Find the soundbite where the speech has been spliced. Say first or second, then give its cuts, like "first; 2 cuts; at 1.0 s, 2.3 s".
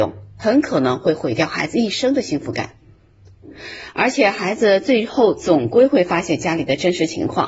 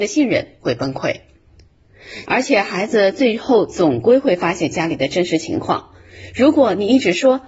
second; 1 cut; at 2.3 s